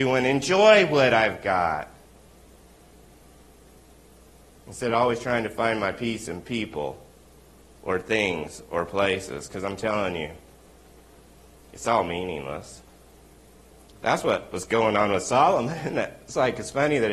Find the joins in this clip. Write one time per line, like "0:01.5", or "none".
none